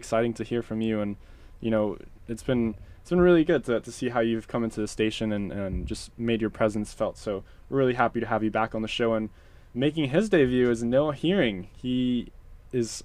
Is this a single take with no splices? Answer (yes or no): yes